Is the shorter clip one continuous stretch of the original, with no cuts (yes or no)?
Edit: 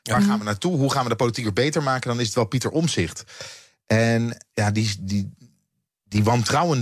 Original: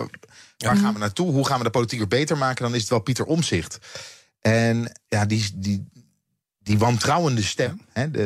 yes